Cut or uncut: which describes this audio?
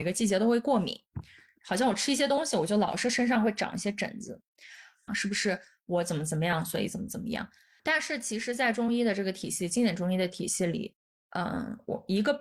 cut